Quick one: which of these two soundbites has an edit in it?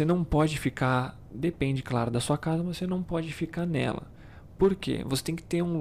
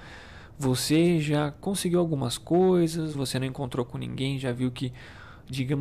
second; 1 cut; at 3.1 s

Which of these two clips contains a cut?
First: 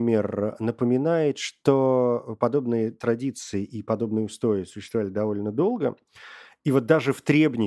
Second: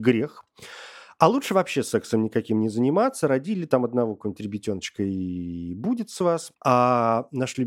second; 1 cut; at 6.5 s

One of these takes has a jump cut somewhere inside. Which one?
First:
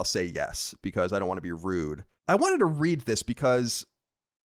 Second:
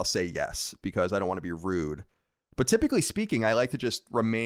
first; 1 cut; at 2.2 s

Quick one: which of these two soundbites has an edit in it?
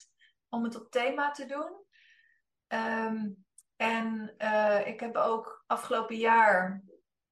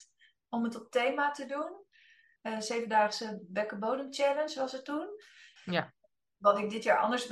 second; 2 cuts; at 2.4 s, 5.6 s

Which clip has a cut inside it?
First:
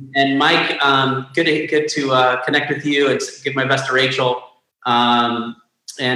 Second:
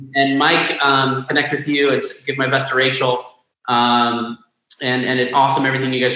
second; 1 cut; at 1.3 s

